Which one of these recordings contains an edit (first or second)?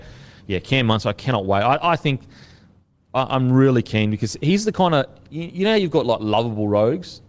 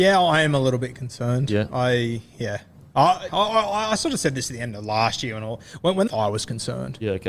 second